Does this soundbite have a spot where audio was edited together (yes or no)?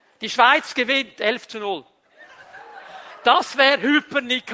no